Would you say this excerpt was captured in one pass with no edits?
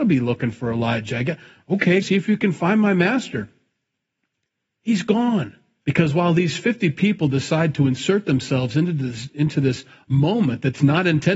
no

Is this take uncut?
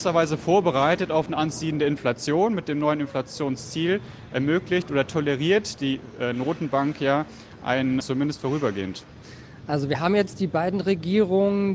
no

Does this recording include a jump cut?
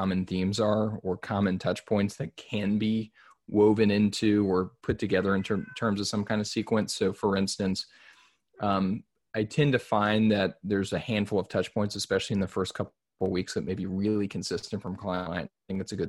no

